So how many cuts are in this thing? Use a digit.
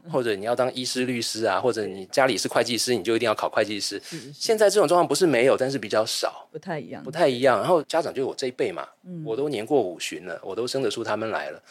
0